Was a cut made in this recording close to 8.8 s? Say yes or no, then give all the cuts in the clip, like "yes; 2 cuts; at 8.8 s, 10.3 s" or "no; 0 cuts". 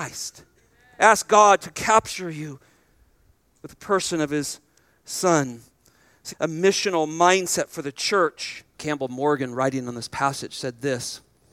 yes; 2 cuts; at 6.3 s, 8.8 s